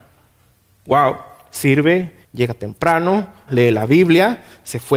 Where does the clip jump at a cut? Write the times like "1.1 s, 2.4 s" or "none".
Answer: 2.2 s, 3.5 s